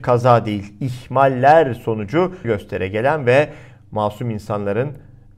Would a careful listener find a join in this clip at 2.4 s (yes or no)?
yes